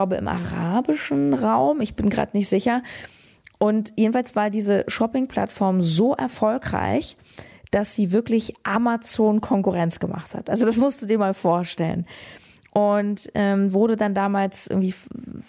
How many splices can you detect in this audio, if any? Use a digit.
0